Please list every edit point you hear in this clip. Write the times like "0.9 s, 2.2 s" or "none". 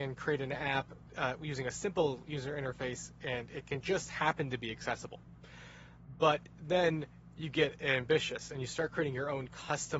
none